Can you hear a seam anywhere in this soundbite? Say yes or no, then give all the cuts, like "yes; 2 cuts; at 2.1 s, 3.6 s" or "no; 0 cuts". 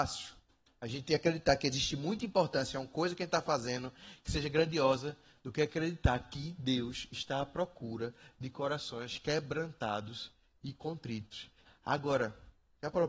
yes; 1 cut; at 11.6 s